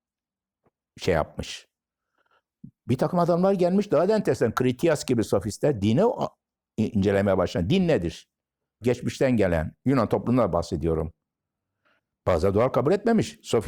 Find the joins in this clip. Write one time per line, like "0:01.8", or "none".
0:08.8
0:12.2